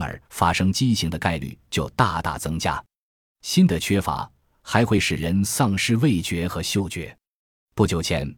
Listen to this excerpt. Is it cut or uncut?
uncut